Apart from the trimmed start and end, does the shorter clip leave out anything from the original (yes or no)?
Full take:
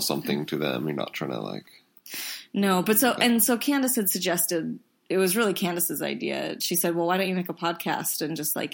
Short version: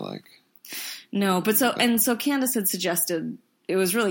no